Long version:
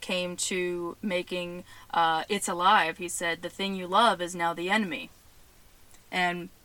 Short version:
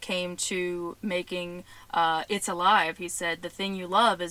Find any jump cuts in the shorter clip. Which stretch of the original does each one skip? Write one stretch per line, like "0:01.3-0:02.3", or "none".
none